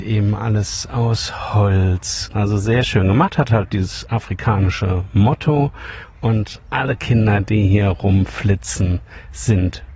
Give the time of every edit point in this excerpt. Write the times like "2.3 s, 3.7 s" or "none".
2.3 s